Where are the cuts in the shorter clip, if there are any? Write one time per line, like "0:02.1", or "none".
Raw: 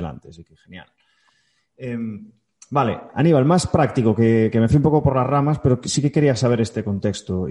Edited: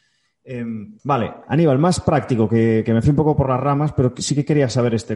0:01.0